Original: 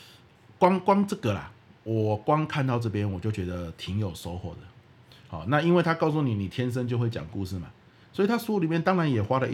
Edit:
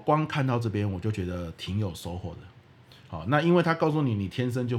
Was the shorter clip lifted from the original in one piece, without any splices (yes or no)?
yes